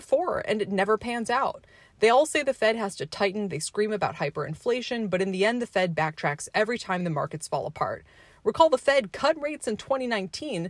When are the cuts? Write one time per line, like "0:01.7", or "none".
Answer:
none